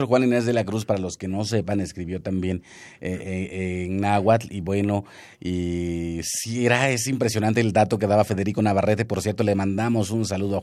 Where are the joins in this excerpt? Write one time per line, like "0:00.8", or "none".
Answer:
none